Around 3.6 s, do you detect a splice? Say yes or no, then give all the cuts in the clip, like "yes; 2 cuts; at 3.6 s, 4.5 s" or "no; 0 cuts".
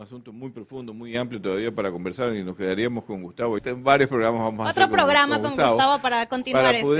yes; 1 cut; at 3.6 s